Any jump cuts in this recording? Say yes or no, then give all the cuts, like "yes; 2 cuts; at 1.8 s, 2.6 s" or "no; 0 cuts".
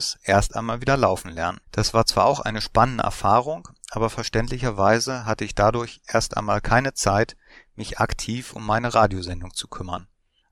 yes; 1 cut; at 1.6 s